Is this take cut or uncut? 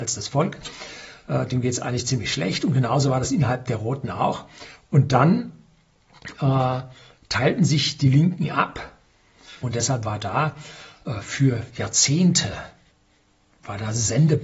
cut